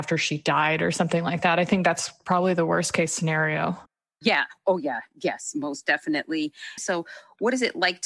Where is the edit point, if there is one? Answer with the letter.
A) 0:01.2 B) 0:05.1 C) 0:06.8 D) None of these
C